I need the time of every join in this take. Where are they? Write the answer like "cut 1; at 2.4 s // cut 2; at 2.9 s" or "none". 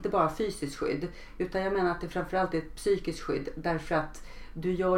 none